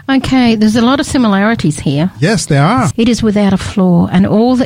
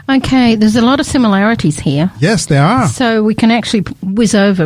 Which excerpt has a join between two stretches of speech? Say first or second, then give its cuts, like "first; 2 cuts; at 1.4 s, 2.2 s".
first; 1 cut; at 2.9 s